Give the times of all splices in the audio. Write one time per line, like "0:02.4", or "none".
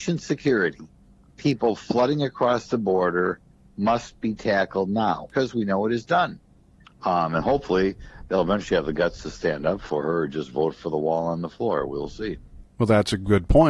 0:05.3
0:06.8